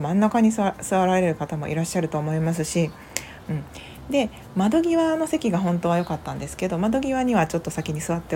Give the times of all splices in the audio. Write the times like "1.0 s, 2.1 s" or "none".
3.4 s